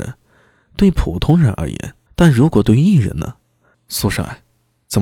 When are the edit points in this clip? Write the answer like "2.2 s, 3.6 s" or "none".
2.1 s, 3.7 s